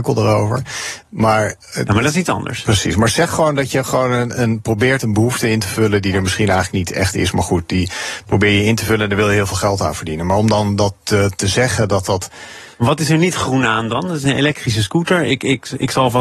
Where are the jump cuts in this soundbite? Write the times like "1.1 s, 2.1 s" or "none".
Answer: 12.7 s